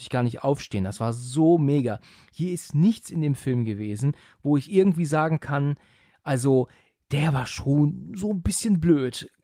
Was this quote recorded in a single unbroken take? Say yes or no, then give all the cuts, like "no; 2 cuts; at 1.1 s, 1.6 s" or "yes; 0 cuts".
yes; 0 cuts